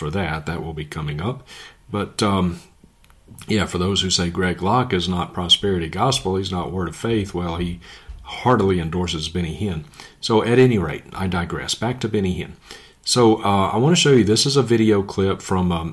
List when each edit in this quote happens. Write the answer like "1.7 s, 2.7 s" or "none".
none